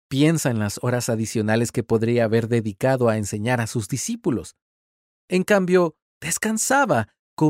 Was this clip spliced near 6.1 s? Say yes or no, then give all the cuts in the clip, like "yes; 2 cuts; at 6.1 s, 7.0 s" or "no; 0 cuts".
yes; 1 cut; at 6.1 s